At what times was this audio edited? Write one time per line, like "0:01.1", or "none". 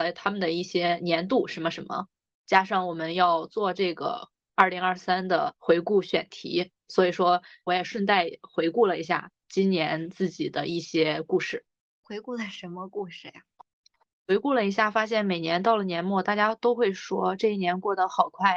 none